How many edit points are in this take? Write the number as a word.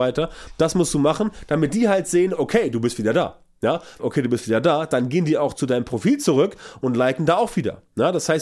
one